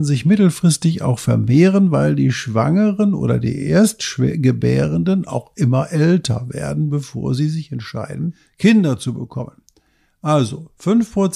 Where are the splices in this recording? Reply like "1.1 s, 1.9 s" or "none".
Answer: none